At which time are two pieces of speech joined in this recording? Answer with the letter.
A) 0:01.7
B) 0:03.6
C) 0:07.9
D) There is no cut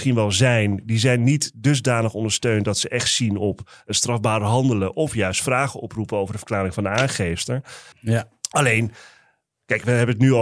C